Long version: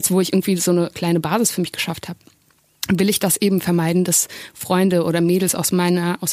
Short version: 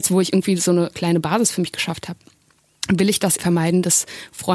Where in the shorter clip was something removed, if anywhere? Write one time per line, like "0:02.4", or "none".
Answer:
0:03.4